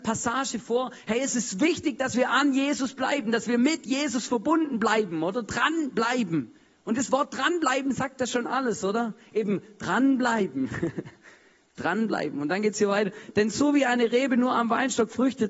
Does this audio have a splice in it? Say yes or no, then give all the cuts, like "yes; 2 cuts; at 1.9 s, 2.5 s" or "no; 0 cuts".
no; 0 cuts